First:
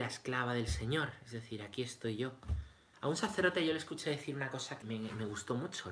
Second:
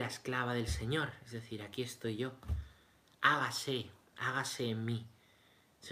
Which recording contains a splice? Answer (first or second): first